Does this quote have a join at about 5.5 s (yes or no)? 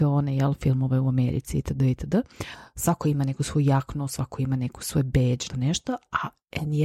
yes